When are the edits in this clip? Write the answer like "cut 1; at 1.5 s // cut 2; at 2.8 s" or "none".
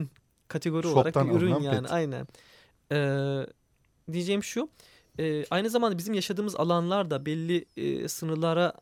none